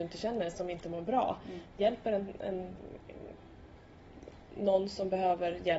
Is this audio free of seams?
yes; 0 cuts

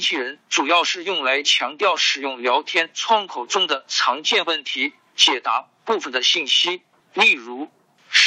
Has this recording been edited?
yes; 1 cut; at 7.0 s

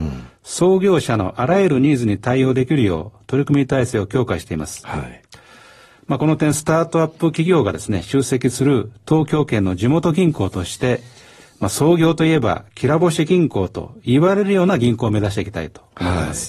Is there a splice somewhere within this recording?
no; 0 cuts

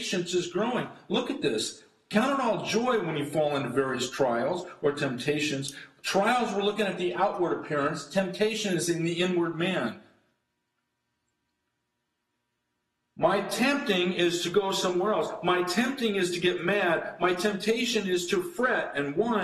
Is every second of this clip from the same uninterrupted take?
yes; 0 cuts

